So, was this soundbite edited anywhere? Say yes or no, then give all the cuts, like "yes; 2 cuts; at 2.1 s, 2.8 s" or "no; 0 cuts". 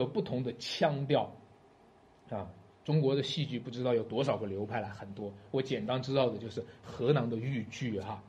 no; 0 cuts